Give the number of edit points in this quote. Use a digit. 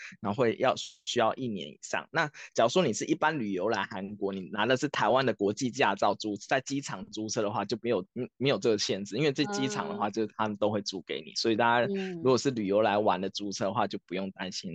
0